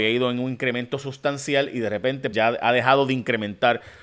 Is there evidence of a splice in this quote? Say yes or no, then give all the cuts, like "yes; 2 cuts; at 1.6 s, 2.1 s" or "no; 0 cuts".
yes; 1 cut; at 2.3 s